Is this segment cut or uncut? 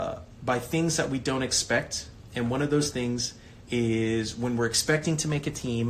uncut